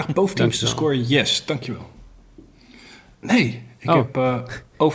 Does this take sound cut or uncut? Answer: cut